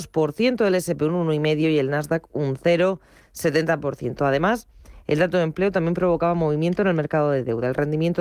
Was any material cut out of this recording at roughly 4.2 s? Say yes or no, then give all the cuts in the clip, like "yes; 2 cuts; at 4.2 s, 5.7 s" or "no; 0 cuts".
yes; 1 cut; at 4.2 s